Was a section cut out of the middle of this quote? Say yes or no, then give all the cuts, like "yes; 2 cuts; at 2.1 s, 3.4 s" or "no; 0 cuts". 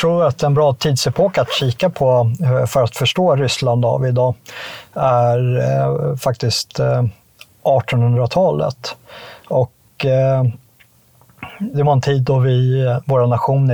yes; 1 cut; at 11.7 s